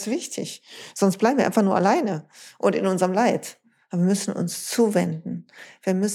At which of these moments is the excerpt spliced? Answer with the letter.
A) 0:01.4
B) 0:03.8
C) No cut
C